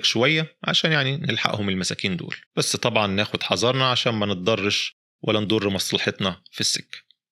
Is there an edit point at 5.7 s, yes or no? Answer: no